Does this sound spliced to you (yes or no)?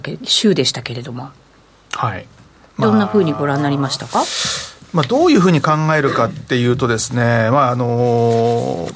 no